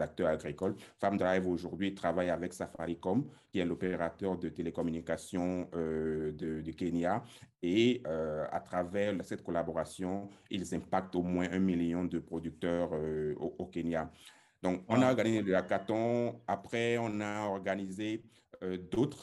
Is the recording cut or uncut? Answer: uncut